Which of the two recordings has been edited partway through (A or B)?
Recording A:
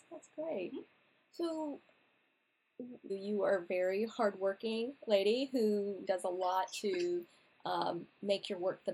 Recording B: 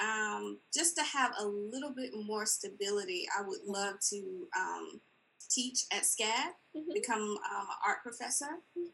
A